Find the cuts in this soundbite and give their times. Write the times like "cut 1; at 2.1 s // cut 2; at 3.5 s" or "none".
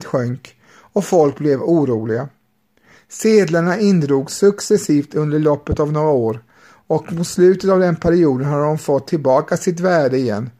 cut 1; at 3.0 s